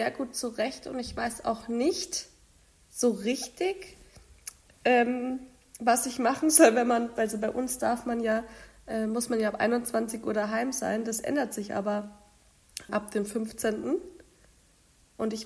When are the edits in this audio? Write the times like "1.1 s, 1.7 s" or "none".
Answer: 12.9 s